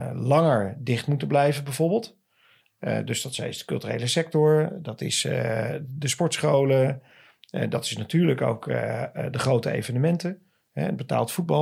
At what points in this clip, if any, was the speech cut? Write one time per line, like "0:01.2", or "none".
none